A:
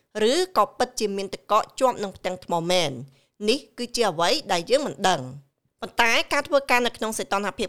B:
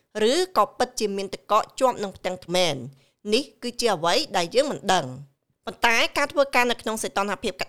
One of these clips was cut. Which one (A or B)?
B